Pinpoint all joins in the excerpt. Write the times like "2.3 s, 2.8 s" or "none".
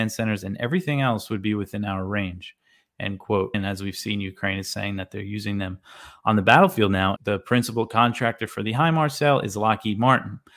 3.5 s, 7.2 s